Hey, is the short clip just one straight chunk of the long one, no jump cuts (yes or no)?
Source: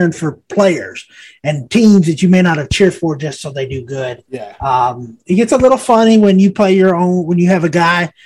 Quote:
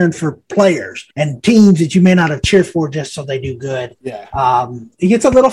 no